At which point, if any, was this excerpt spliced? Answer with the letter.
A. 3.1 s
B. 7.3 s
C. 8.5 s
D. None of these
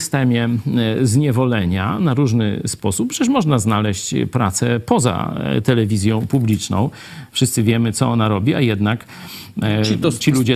D